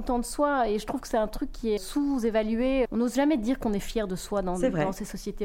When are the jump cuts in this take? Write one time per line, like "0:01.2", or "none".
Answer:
0:01.8
0:02.9